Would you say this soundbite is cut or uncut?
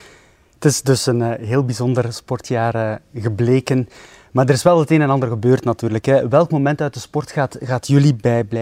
uncut